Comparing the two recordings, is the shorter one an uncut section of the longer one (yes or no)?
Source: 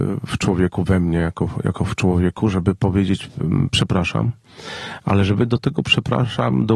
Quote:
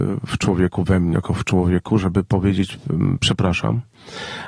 no